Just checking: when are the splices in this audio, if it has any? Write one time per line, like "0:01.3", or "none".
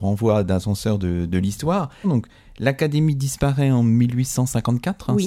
0:02.0